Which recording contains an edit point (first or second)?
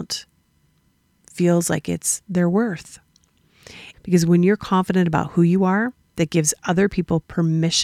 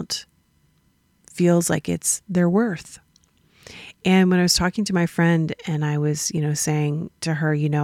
first